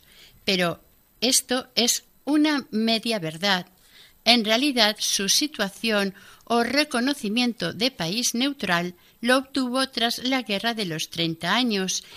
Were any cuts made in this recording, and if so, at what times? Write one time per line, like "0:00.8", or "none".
none